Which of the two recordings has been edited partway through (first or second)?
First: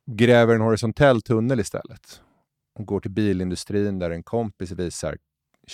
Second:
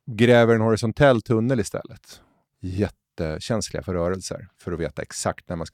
second